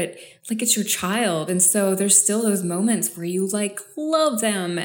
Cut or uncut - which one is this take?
uncut